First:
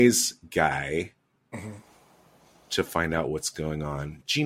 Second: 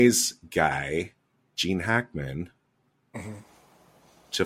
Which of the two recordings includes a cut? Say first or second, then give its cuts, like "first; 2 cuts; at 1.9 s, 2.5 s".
first; 1 cut; at 1.4 s